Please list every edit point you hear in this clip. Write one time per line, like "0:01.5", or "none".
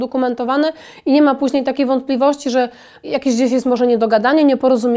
0:03.0

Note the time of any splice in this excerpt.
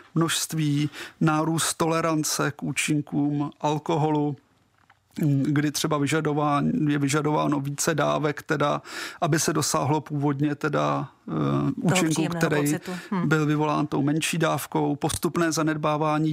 none

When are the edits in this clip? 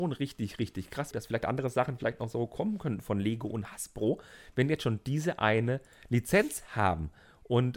0:01.1

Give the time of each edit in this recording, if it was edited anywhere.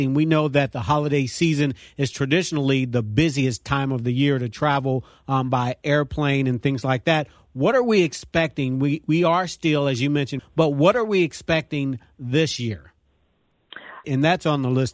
0:10.4
0:14.0

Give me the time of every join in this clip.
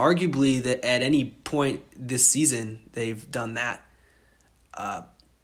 none

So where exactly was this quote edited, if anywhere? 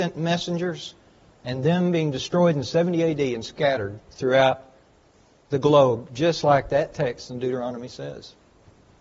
none

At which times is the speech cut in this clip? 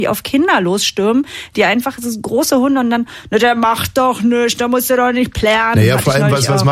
none

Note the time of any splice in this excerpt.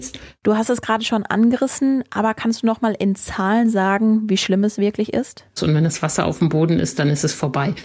0:05.6

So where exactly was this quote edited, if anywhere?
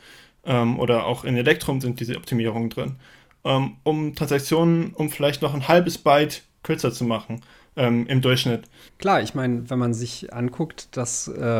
0:08.9

